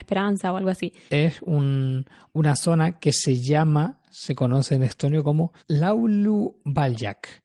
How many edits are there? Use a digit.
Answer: 2